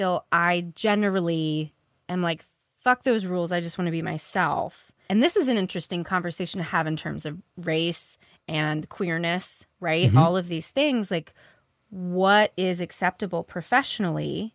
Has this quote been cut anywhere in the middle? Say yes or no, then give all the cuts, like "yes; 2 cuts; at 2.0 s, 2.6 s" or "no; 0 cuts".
yes; 1 cut; at 5.1 s